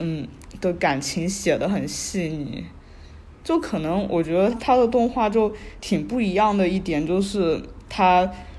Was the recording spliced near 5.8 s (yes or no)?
no